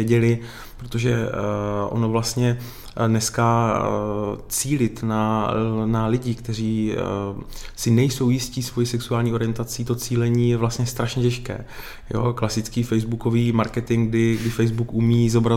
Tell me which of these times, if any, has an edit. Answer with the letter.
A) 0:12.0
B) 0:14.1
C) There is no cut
C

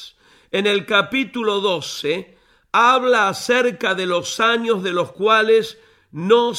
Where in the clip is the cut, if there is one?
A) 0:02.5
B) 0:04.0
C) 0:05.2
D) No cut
D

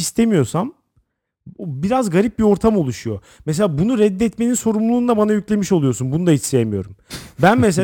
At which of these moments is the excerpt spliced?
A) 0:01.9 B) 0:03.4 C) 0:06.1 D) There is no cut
D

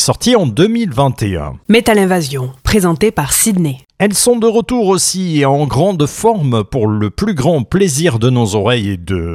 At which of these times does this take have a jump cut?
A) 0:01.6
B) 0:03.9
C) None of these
C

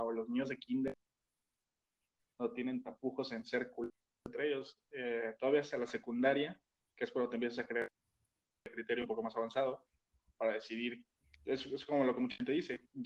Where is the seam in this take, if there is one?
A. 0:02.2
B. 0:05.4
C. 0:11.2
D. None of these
A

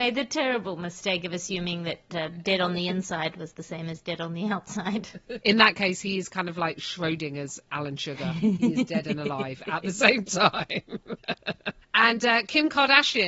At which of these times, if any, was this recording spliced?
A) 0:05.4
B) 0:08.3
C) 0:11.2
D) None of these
A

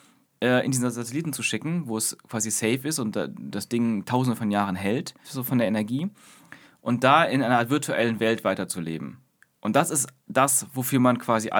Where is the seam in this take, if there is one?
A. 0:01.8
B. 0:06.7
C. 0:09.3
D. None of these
D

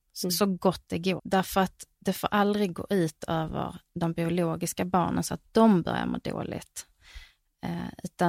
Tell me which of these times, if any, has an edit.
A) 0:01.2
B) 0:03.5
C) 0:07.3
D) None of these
A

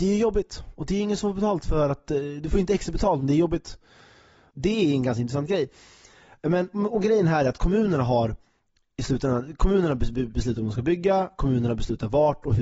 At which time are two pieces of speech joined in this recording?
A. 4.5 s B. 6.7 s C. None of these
A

